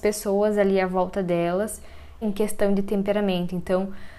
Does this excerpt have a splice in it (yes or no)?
yes